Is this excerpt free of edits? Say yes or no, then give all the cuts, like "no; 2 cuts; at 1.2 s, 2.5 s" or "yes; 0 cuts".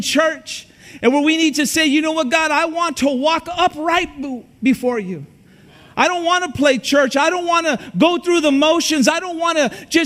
yes; 0 cuts